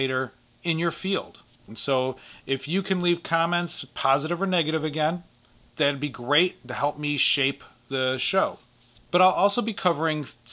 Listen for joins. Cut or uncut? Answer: cut